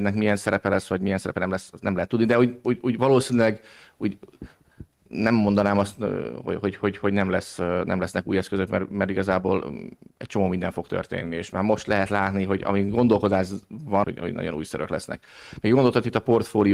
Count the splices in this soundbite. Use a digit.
1